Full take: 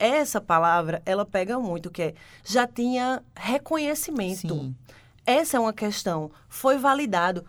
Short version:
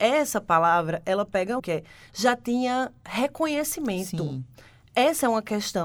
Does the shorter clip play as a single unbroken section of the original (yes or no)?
no